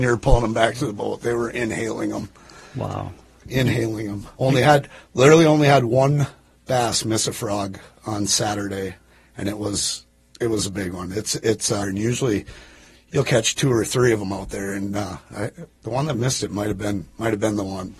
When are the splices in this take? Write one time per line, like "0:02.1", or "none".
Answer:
0:11.8